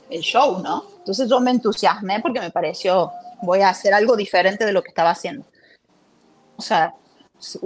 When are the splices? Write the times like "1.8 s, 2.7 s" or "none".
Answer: 1.0 s, 3.3 s, 6.6 s